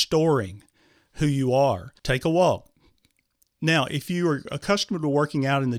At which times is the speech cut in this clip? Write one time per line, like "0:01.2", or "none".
0:02.0